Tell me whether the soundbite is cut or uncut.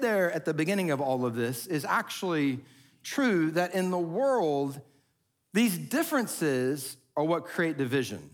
uncut